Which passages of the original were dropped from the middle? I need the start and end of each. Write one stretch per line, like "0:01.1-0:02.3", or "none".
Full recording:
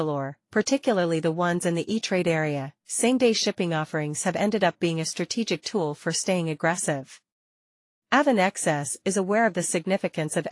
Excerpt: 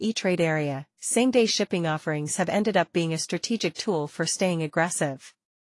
none